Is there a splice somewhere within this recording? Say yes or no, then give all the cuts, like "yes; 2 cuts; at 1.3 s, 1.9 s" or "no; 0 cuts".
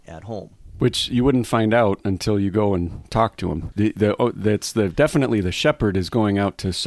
yes; 1 cut; at 3.7 s